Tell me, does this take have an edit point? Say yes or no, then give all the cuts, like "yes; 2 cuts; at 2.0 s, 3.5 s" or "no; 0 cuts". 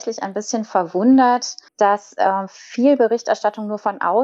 yes; 1 cut; at 1.7 s